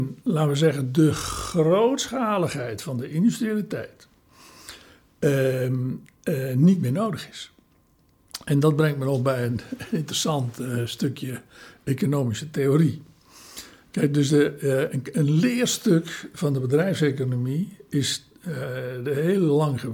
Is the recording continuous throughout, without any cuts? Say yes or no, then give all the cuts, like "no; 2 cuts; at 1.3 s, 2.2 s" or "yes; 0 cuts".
yes; 0 cuts